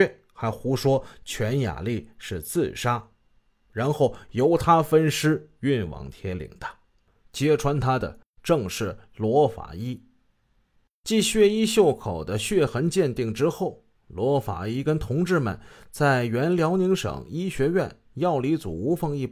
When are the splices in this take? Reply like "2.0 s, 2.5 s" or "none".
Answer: 7.2 s